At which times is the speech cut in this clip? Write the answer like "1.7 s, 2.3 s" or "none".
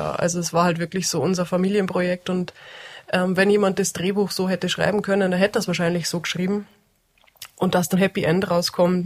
7.9 s

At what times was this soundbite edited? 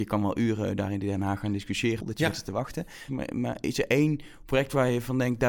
2.0 s, 3.1 s

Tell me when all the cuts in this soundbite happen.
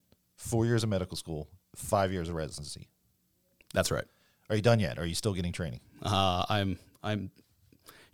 none

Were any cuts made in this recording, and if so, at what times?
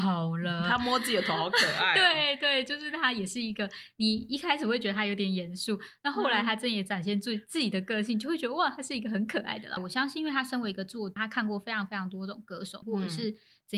9.8 s, 11.2 s, 12.8 s

